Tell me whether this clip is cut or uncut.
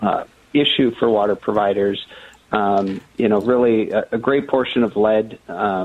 uncut